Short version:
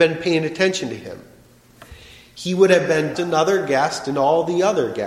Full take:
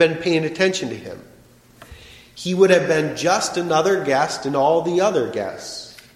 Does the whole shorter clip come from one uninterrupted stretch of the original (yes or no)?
no